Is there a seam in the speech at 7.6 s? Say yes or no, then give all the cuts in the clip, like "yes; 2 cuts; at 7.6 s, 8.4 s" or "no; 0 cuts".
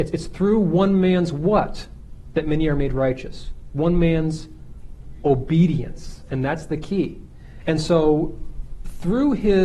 yes; 1 cut; at 7.6 s